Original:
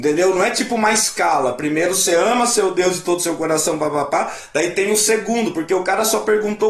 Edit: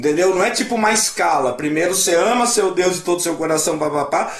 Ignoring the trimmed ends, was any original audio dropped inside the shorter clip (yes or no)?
no